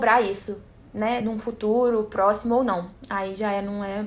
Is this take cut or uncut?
uncut